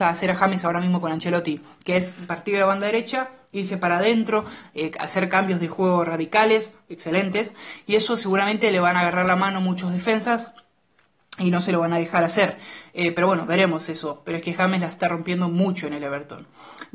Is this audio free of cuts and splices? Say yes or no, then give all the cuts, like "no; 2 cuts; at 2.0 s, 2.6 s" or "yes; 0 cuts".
yes; 0 cuts